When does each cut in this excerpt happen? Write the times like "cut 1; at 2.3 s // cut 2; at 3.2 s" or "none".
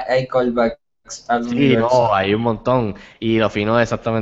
none